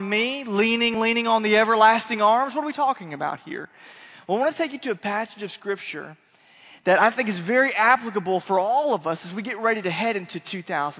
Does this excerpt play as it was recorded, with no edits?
no; 1 cut; at 0.9 s

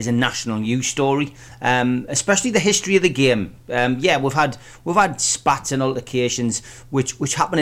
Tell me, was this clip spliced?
no; 0 cuts

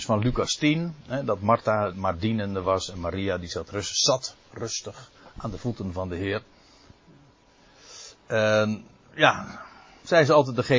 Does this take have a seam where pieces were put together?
no; 0 cuts

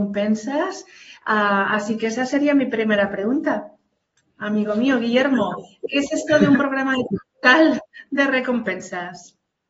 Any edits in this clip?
no; 0 cuts

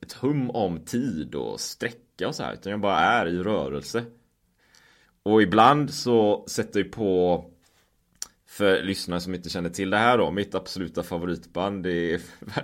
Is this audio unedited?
yes; 0 cuts

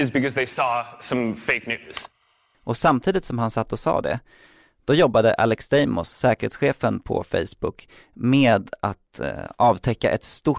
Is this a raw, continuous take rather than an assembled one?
yes; 0 cuts

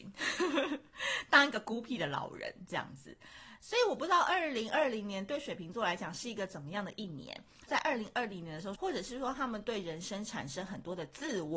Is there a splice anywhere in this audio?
yes; 2 cuts; at 7.7 s, 8.7 s

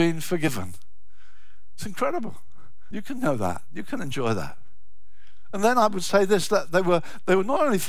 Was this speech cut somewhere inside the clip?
yes; 1 cut; at 2.9 s

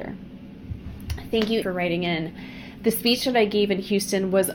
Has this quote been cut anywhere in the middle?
yes; 1 cut; at 1.6 s

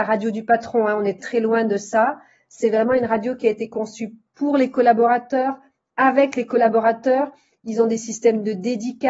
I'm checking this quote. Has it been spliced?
yes; 1 cut; at 1.2 s

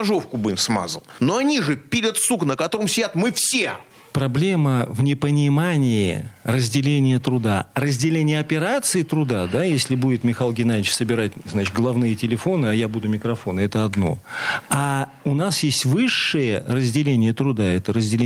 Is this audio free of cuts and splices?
yes; 0 cuts

